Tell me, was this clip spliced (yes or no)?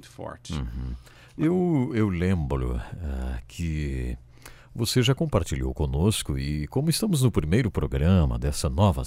no